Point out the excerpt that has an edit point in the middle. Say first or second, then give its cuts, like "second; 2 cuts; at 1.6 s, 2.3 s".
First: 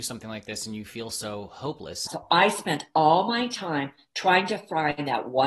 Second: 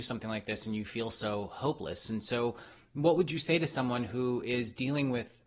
first; 1 cut; at 2.1 s